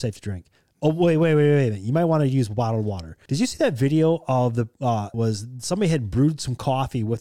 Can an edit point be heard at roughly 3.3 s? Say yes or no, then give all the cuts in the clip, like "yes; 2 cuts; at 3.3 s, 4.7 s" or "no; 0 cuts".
yes; 2 cuts; at 3.3 s, 5.1 s